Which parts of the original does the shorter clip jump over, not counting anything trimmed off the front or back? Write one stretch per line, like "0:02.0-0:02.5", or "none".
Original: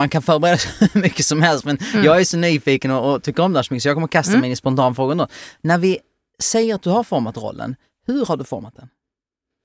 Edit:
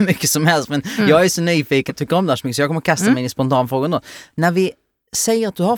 0:02.8-0:03.1